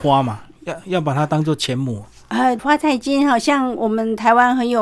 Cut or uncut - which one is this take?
cut